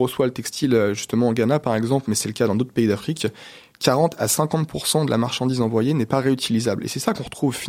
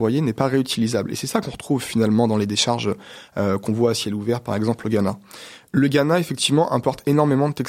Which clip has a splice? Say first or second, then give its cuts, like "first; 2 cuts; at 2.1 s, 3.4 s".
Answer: second; 1 cut; at 5.7 s